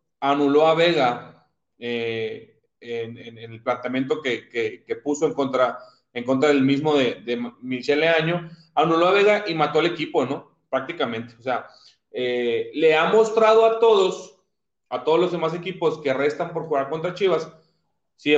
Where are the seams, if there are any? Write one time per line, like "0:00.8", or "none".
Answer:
none